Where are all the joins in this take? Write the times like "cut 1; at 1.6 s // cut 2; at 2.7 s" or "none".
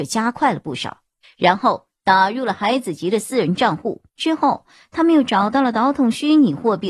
cut 1; at 1.2 s // cut 2; at 4.1 s